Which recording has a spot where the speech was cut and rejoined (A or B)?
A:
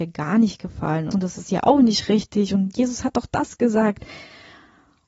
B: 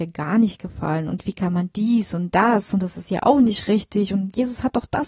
A